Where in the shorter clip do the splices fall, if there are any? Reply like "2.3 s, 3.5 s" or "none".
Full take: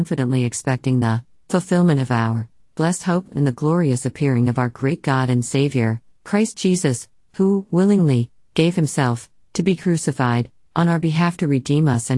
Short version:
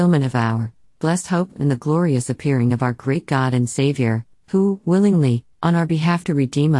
4.3 s, 5.5 s